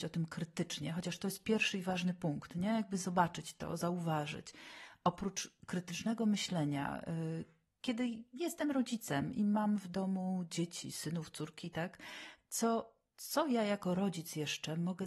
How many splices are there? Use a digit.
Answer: 0